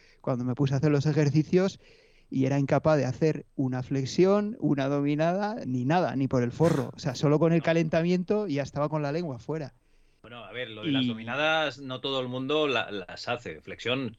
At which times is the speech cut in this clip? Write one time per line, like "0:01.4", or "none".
0:05.6